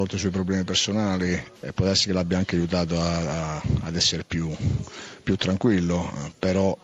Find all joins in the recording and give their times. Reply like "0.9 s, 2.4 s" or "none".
1.6 s